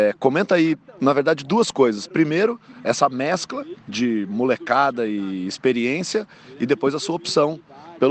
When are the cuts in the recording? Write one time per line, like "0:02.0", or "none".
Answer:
none